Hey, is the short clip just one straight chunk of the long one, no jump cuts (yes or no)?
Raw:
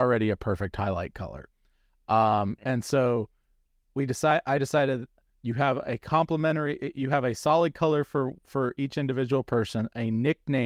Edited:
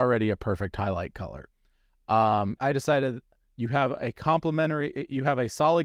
no